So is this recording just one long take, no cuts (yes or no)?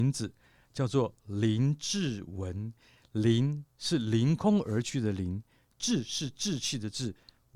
yes